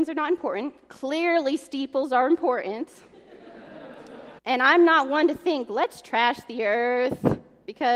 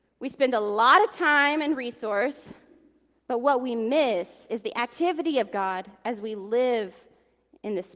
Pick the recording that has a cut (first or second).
first